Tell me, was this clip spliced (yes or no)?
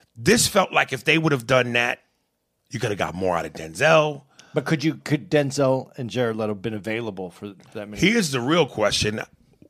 yes